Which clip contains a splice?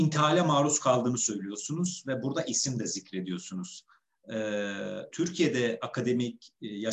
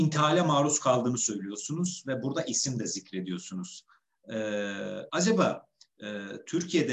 first; 1 cut; at 5.1 s

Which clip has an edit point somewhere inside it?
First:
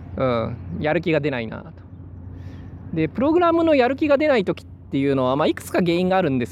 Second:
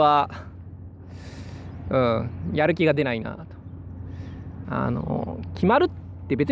second; 1 cut; at 4.6 s

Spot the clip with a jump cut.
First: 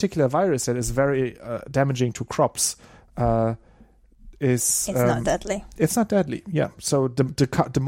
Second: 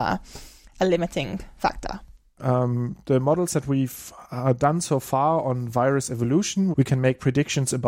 second; 2 cuts; at 2.4 s, 6.7 s

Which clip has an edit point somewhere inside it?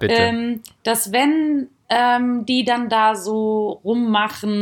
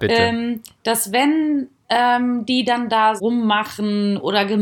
second; 1 cut; at 3.2 s

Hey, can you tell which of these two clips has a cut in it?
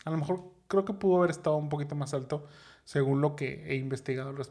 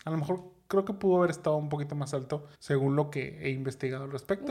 second; 1 cut; at 2.5 s

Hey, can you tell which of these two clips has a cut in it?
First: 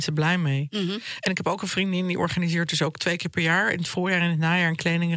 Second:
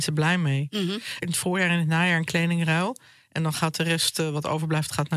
second; 1 cut; at 1.2 s

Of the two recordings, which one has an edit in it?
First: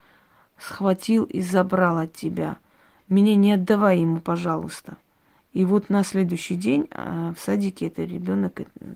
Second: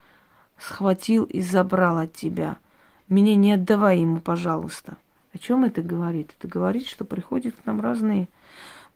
second; 1 cut; at 5.2 s

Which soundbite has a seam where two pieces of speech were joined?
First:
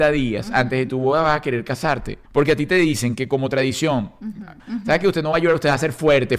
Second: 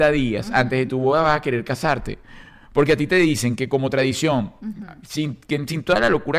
first; 2 cuts; at 2.3 s, 4.6 s

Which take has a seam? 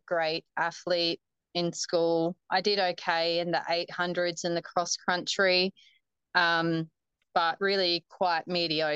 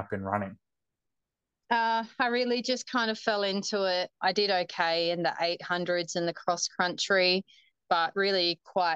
second; 2 cuts; at 4.2 s, 7.8 s

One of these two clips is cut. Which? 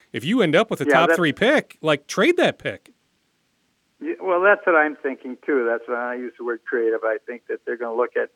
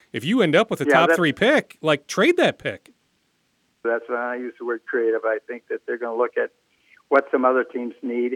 second; 1 cut; at 3.8 s

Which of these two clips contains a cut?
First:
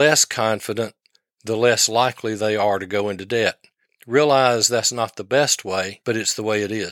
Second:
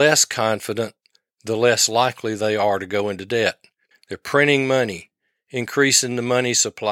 second; 1 cut; at 3.9 s

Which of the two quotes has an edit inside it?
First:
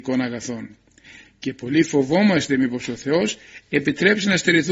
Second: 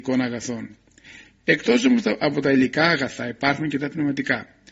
second; 1 cut; at 1.4 s

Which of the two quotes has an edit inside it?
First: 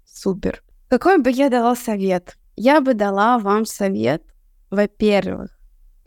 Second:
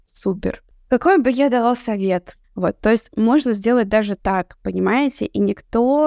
second; 1 cut; at 2.4 s

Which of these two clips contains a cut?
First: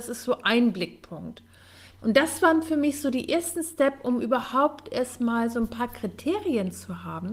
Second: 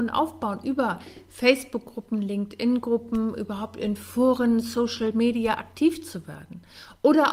first; 1 cut; at 2.0 s

